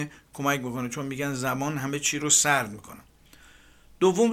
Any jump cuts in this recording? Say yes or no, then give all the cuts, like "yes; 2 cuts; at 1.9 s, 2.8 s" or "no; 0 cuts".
no; 0 cuts